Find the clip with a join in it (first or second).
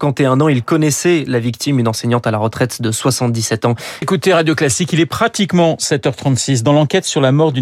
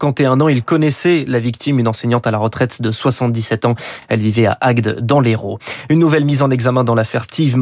first